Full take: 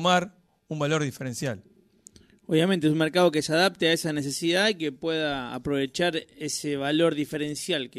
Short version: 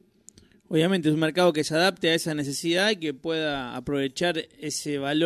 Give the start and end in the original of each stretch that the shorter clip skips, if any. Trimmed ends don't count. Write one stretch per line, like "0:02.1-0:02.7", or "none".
none